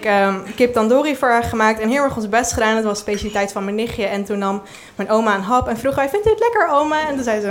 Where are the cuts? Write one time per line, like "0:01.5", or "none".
none